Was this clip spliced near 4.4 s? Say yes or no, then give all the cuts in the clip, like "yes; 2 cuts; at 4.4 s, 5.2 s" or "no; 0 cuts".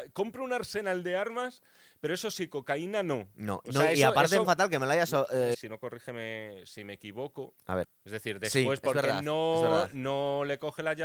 yes; 3 cuts; at 4.4 s, 5.5 s, 7.8 s